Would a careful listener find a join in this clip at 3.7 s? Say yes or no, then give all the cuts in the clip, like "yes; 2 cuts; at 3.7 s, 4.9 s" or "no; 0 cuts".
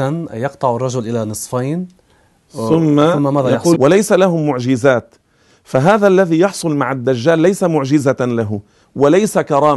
yes; 1 cut; at 3.7 s